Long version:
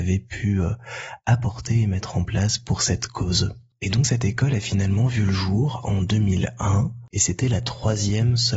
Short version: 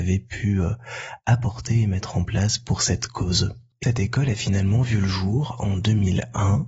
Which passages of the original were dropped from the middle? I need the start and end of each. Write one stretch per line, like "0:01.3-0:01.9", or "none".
0:03.8-0:04.1